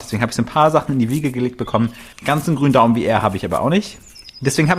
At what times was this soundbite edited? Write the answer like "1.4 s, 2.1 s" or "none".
2.1 s